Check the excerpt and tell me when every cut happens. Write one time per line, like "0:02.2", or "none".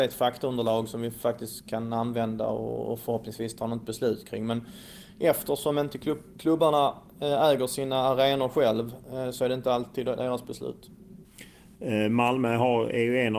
none